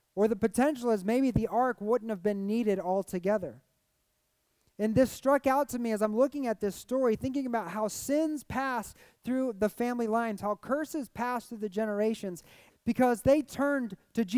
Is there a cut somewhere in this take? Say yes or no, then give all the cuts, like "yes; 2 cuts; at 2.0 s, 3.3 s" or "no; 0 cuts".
yes; 2 cuts; at 10.4 s, 12.7 s